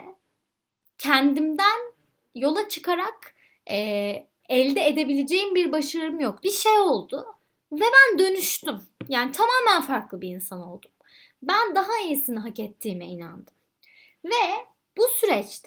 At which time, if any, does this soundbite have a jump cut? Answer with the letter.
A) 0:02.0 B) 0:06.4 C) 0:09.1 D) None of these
B